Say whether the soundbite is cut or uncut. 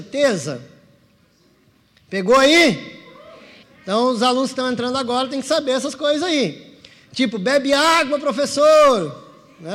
cut